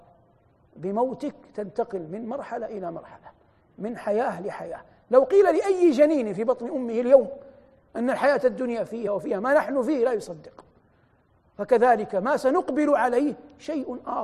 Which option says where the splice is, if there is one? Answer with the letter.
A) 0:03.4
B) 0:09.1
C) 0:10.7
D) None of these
B